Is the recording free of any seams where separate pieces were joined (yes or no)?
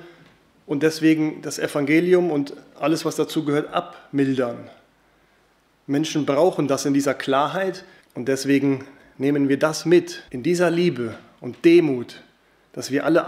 no